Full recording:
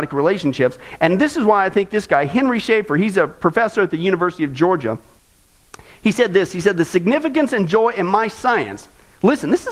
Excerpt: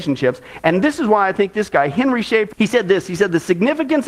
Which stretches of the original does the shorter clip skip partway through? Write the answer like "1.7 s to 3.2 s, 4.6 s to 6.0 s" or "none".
2.9 s to 6.0 s